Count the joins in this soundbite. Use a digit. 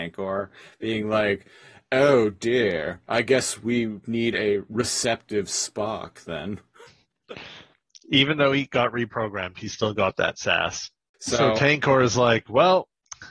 1